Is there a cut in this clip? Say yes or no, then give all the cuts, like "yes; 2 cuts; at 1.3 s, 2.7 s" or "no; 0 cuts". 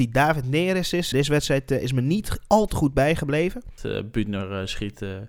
yes; 2 cuts; at 1.1 s, 3.8 s